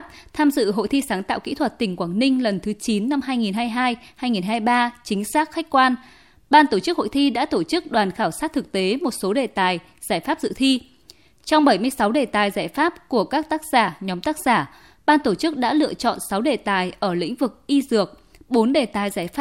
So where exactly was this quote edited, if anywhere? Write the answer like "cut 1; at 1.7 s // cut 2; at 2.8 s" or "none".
none

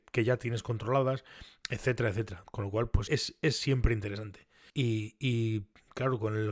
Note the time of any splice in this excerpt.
cut 1; at 3.1 s // cut 2; at 4.7 s

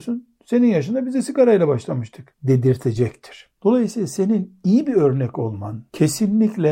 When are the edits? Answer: none

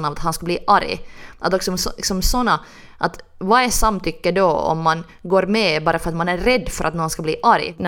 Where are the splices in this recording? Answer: none

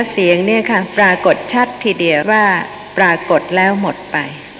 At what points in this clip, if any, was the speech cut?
cut 1; at 2.2 s

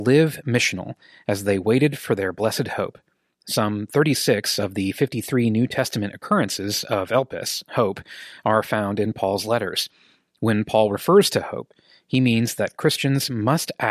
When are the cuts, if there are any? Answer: cut 1; at 3.3 s

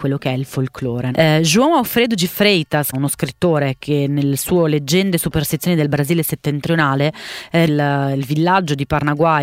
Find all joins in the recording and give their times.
cut 1; at 1.1 s // cut 2; at 2.9 s // cut 3; at 7.7 s

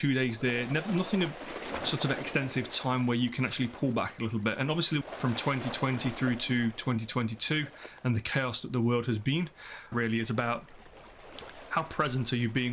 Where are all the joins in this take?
cut 1; at 5.0 s // cut 2; at 9.9 s

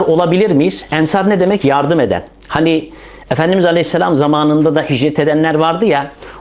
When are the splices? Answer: none

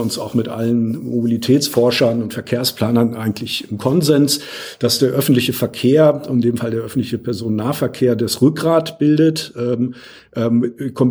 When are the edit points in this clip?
none

